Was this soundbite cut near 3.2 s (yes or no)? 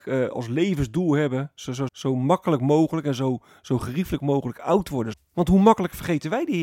no